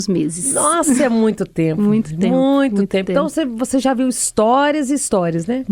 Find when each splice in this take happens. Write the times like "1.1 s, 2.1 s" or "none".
none